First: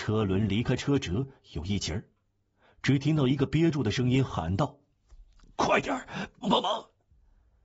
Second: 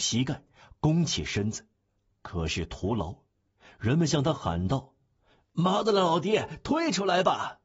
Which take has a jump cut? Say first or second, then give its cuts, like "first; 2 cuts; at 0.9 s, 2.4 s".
first; 1 cut; at 6.4 s